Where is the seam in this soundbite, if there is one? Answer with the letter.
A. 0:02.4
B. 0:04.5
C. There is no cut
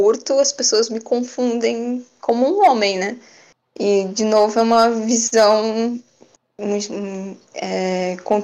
C